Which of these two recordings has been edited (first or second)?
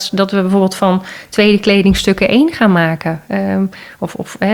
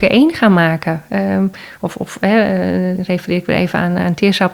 second